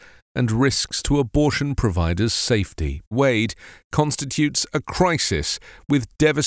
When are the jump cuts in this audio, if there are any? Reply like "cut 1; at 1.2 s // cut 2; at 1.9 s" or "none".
cut 1; at 3.1 s